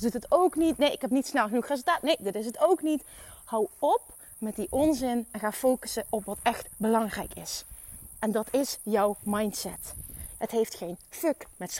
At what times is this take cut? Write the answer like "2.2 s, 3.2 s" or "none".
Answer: 10.4 s